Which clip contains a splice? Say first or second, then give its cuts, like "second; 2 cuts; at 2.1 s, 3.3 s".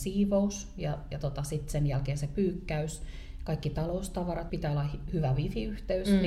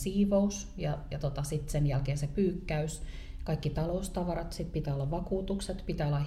first; 1 cut; at 4.5 s